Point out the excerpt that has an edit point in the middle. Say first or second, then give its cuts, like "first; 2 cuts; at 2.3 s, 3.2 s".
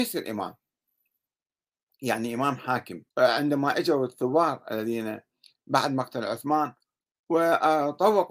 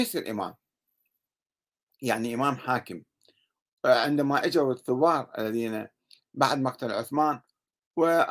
first; 1 cut; at 3.1 s